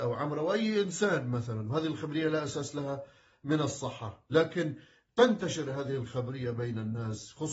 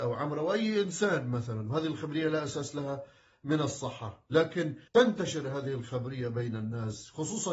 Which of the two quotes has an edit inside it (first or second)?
second